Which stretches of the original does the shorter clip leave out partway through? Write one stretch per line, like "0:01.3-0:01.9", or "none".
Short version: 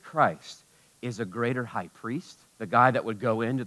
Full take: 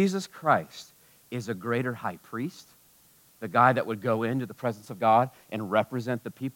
0:02.8-0:03.3